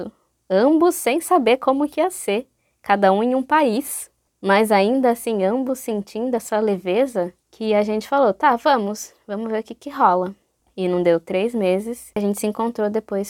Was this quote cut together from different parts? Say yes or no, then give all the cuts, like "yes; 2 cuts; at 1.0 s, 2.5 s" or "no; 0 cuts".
no; 0 cuts